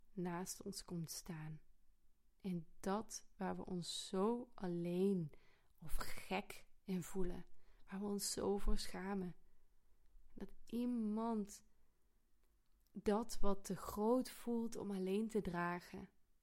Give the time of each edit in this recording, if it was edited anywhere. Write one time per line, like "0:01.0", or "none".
none